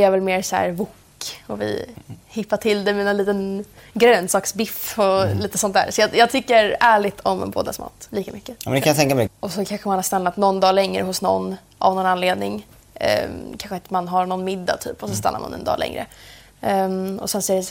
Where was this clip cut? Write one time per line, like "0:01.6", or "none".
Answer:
0:08.1
0:09.3